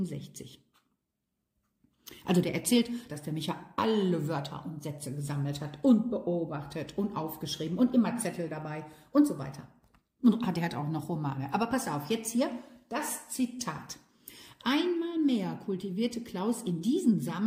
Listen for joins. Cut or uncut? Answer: cut